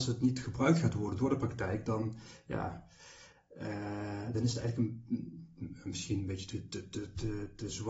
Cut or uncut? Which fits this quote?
uncut